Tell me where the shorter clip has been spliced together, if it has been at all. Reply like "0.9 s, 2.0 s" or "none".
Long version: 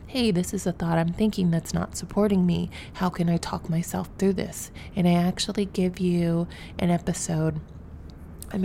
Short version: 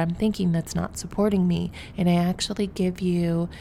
1.9 s